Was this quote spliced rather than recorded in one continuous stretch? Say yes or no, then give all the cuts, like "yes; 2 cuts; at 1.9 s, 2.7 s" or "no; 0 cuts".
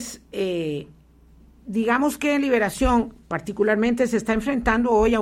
no; 0 cuts